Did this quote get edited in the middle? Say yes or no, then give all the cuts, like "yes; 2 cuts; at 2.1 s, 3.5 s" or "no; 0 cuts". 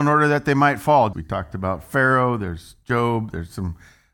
yes; 1 cut; at 1.1 s